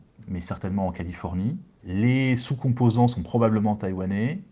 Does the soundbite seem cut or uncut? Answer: uncut